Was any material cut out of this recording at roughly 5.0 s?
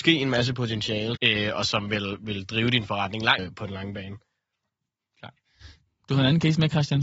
no; 2 cuts; at 1.2 s, 3.4 s

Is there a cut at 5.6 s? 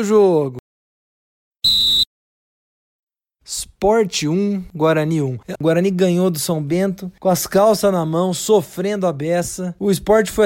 yes; 1 cut; at 5.6 s

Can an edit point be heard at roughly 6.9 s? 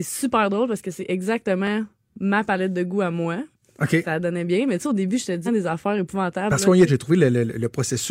yes; 2 cuts; at 5.5 s, 6.9 s

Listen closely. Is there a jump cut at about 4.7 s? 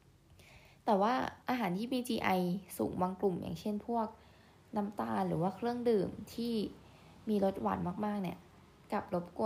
no; 1 cut; at 1.4 s

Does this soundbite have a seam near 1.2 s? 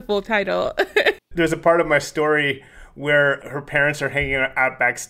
yes; 1 cut; at 1.2 s

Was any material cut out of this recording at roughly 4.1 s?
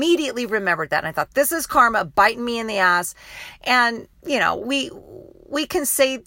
yes; 1 cut; at 4.1 s

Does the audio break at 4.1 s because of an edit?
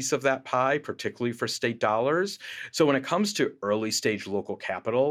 no; 1 cut; at 2.7 s

